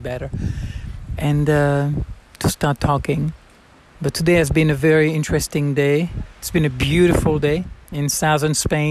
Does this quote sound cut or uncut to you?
uncut